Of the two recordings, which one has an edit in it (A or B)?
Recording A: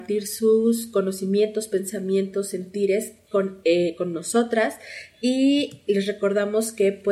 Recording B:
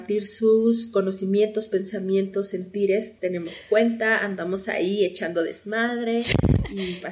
B